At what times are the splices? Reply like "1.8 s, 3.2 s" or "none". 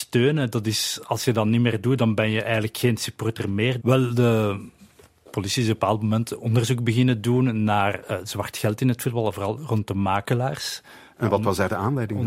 3.8 s